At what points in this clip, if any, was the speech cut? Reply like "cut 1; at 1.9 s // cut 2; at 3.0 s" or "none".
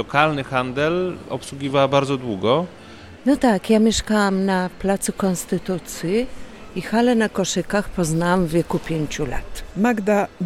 cut 1; at 3.2 s

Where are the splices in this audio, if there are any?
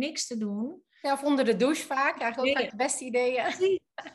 none

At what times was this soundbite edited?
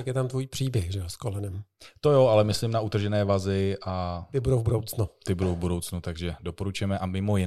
none

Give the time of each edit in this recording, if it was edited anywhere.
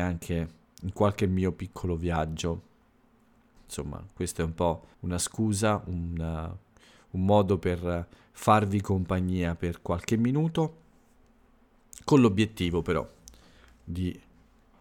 cut 1; at 3.6 s // cut 2; at 4.9 s

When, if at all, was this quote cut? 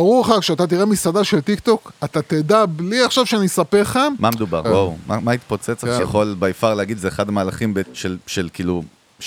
cut 1; at 4.6 s // cut 2; at 6.0 s // cut 3; at 7.8 s

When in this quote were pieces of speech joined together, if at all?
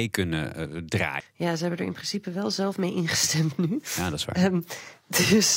cut 1; at 1.2 s

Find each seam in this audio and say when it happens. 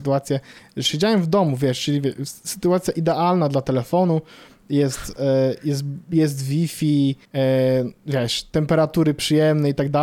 cut 1; at 7.3 s

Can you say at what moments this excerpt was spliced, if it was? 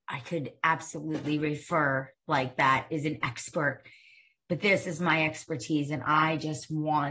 none

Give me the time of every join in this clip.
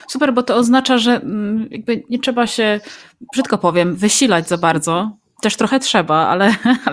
none

